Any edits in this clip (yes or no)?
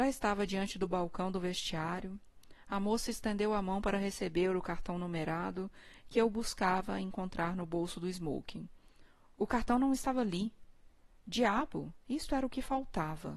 no